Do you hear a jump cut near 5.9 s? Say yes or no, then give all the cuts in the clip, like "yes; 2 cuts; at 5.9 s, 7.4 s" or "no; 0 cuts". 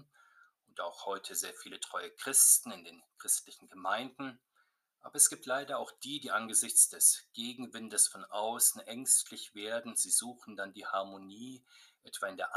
no; 0 cuts